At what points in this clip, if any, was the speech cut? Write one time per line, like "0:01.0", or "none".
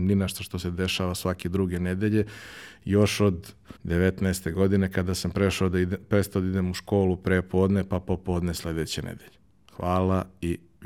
0:03.8